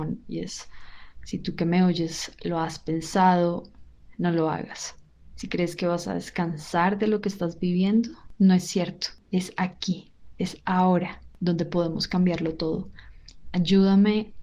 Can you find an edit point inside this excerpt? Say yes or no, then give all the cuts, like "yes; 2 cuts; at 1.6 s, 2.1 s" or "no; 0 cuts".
yes; 2 cuts; at 5.3 s, 13.4 s